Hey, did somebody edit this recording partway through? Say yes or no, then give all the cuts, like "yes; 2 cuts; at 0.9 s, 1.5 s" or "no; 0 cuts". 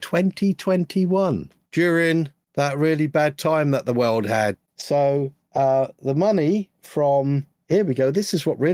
no; 0 cuts